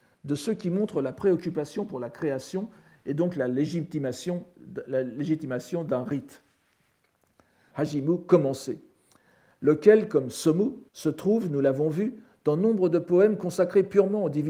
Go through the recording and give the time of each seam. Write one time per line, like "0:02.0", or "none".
0:07.7
0:10.9